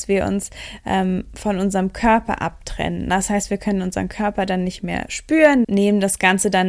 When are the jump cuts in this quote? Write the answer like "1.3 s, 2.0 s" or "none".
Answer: 5.6 s